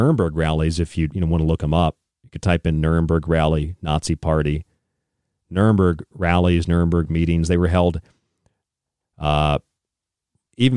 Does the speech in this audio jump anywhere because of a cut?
yes; 1 cut; at 1.1 s

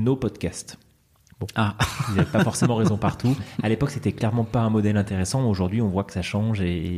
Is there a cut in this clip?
no; 0 cuts

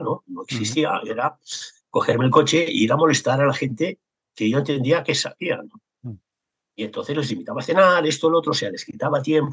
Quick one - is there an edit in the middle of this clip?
no; 0 cuts

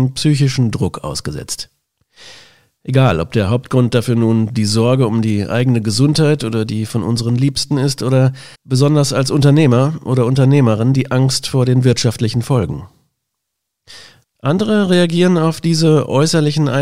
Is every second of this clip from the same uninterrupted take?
no; 2 cuts; at 8.5 s, 14.2 s

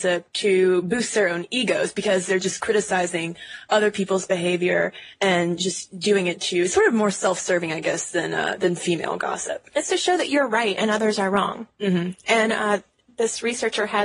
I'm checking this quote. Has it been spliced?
no; 0 cuts

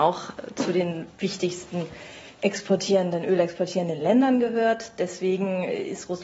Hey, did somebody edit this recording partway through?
no; 0 cuts

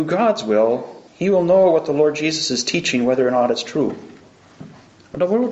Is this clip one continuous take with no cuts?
no; 1 cut; at 1.1 s

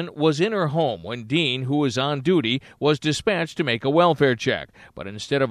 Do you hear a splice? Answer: no; 0 cuts

